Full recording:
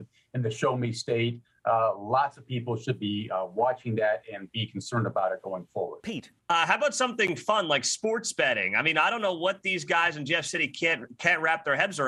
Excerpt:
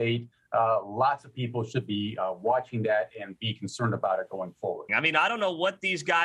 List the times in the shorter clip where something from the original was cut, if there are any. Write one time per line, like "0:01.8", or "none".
0:04.9